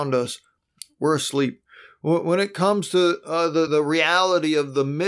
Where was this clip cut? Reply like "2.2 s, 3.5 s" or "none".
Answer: 3.7 s